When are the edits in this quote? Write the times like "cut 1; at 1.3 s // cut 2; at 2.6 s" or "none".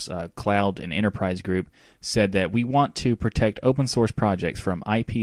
none